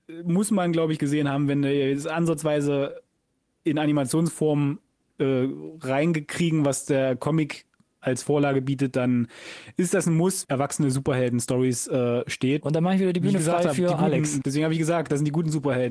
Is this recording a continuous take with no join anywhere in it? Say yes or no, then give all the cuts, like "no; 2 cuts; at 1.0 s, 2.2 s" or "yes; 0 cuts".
no; 3 cuts; at 10.4 s, 12.6 s, 14.4 s